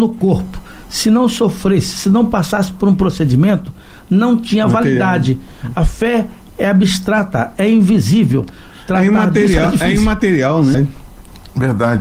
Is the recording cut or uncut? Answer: cut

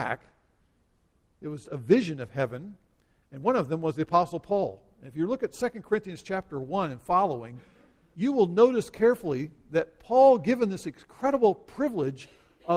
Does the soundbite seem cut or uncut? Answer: cut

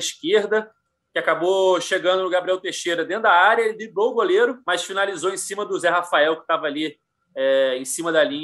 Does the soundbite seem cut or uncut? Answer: uncut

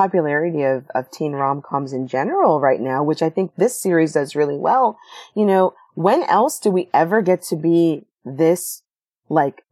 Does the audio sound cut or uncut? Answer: uncut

